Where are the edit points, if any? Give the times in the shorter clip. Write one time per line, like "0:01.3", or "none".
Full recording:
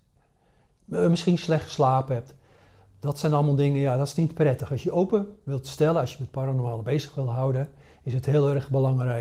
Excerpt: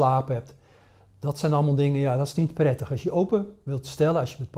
none